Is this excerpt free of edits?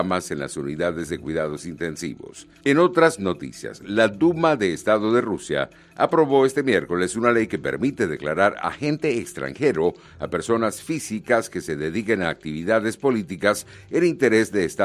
yes; 0 cuts

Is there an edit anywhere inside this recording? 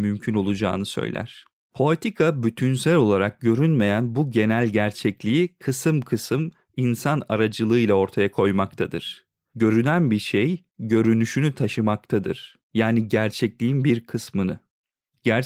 yes; 1 cut; at 9.5 s

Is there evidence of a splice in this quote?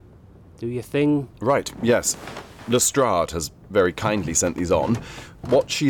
no; 0 cuts

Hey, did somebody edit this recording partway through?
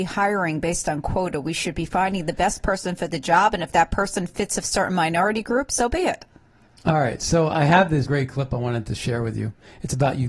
yes; 1 cut; at 8.1 s

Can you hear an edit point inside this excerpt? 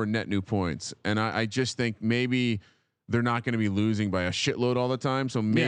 no; 0 cuts

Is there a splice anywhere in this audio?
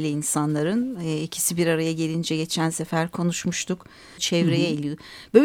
yes; 1 cut; at 4.2 s

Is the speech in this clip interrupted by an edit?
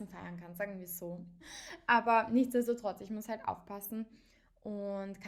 yes; 1 cut; at 1.4 s

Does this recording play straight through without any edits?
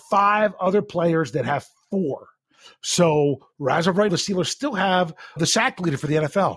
no; 2 cuts; at 4.1 s, 5.4 s

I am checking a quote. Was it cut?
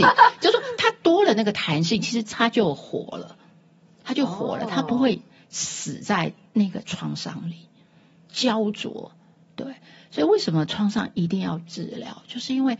yes; 1 cut; at 8.3 s

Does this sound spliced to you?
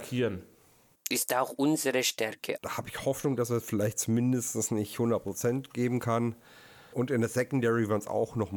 yes; 3 cuts; at 0.9 s, 2.6 s, 6.9 s

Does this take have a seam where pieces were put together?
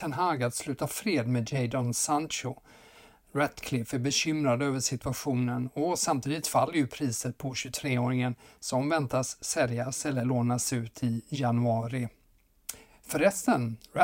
no; 0 cuts

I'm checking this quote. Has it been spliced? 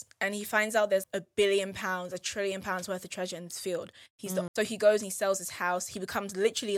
yes; 2 cuts; at 1.0 s, 4.5 s

